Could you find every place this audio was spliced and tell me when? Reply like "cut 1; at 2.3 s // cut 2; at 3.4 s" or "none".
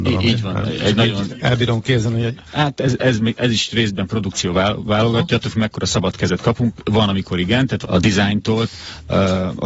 cut 1; at 2.5 s // cut 2; at 7.8 s